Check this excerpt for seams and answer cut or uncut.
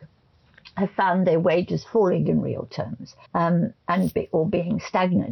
cut